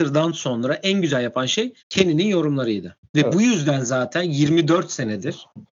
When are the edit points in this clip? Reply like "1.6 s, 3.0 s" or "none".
1.8 s, 3.1 s